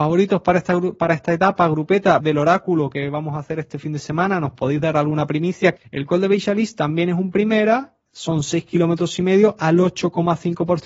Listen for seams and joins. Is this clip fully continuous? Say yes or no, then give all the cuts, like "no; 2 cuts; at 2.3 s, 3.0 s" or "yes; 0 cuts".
no; 2 cuts; at 2.2 s, 5.8 s